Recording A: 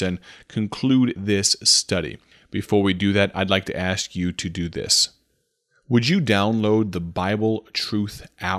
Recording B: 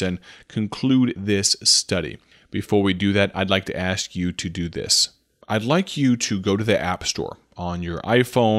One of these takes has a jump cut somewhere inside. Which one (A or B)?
B